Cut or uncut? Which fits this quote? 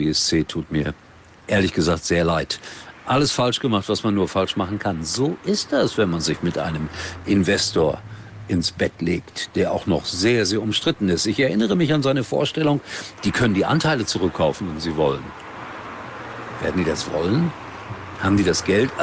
cut